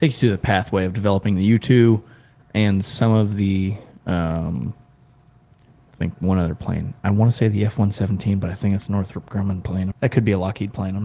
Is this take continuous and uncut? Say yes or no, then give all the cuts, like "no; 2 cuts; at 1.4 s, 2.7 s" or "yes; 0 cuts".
no; 2 cuts; at 2.4 s, 9.9 s